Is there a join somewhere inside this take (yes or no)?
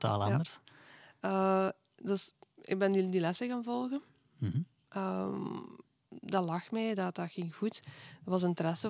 no